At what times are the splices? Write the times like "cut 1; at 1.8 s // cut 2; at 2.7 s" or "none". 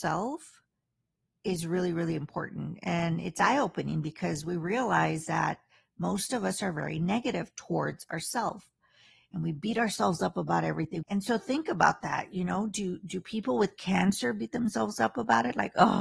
cut 1; at 11.0 s